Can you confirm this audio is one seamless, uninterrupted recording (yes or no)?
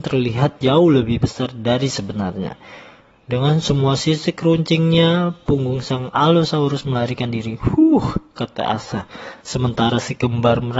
yes